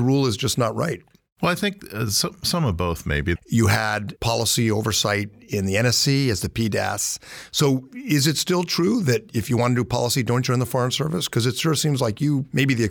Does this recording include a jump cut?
yes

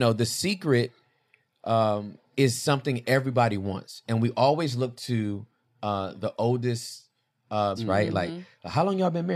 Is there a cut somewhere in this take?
yes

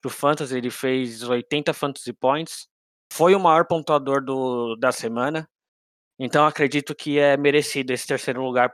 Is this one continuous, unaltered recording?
yes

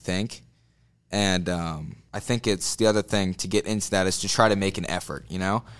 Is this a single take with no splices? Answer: yes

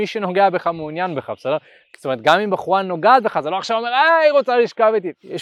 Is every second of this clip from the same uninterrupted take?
yes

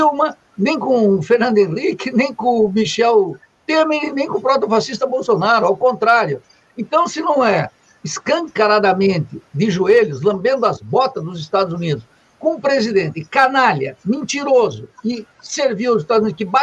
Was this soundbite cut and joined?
no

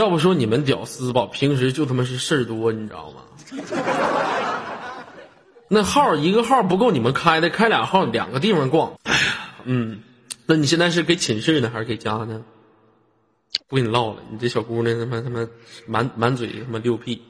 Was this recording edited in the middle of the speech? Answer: yes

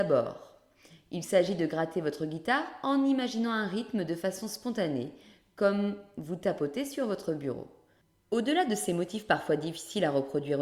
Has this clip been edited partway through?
no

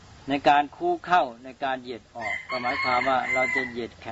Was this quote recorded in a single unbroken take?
yes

